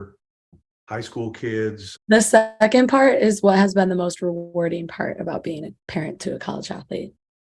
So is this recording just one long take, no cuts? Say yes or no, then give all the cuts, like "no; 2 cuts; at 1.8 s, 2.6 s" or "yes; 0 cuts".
no; 2 cuts; at 2.0 s, 5.8 s